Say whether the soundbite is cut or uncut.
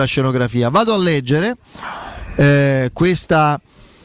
uncut